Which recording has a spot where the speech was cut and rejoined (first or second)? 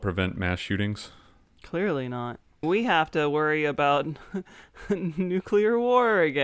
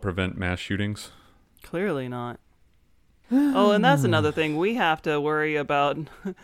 first